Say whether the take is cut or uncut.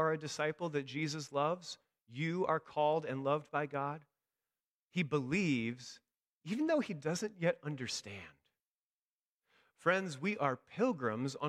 uncut